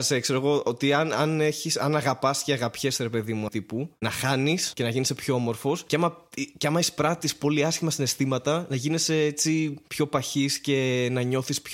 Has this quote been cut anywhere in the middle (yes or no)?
yes